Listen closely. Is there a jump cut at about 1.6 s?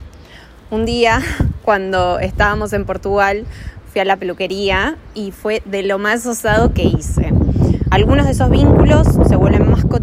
no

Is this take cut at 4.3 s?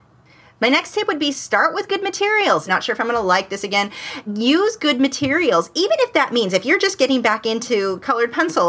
yes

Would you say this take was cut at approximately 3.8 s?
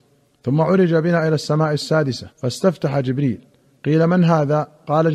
no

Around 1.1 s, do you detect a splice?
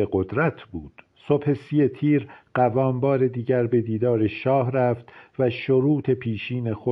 yes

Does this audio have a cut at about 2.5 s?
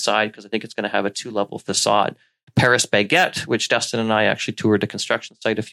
yes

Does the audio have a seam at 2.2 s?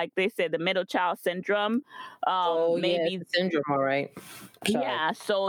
no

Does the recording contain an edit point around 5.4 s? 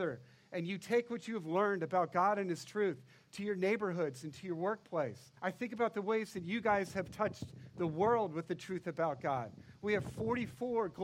yes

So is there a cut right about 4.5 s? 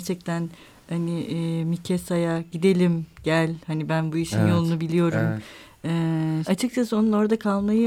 no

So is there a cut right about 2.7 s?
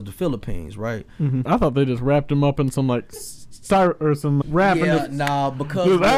no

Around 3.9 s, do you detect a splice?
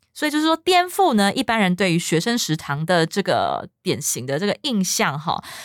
no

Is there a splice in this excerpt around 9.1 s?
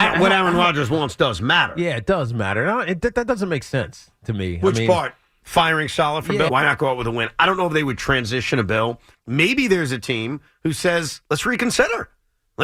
yes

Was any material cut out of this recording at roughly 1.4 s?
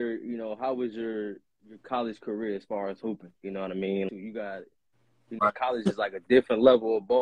no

